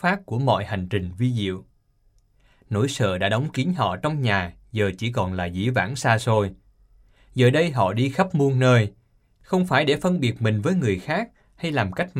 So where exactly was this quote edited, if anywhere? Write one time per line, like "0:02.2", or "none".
none